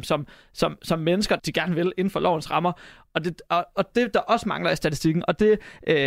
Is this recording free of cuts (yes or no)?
no